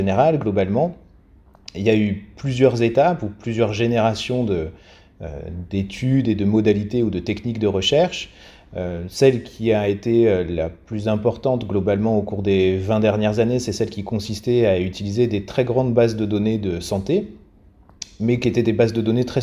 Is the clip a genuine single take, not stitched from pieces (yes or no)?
yes